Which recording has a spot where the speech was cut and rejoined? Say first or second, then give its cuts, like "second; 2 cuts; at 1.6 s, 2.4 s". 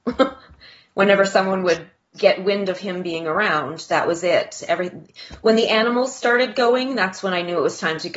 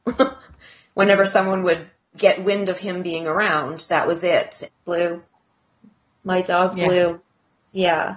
second; 1 cut; at 4.7 s